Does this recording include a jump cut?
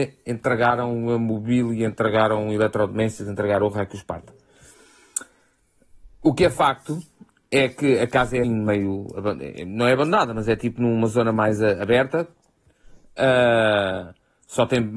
yes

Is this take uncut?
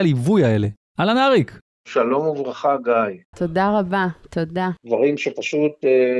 no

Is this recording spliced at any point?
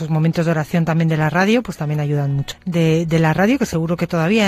yes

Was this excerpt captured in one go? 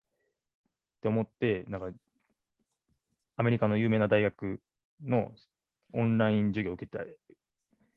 yes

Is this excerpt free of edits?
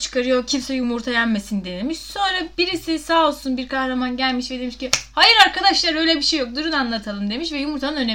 yes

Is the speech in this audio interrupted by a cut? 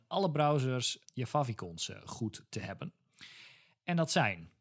yes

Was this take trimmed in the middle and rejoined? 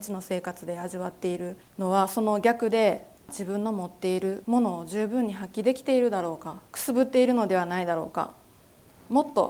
yes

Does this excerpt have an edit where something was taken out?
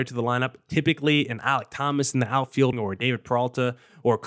yes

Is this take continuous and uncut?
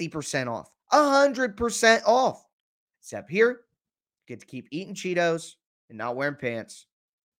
no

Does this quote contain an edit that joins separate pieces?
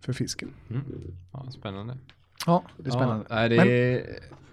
no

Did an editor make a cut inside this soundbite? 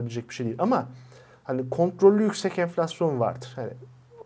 no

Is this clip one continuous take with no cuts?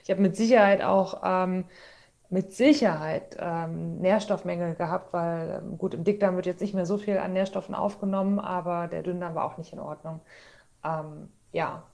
yes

